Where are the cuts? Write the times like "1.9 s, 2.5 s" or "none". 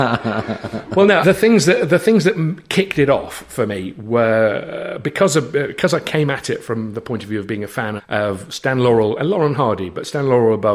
1.2 s, 8.0 s

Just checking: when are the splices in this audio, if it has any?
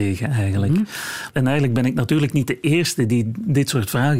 1.3 s

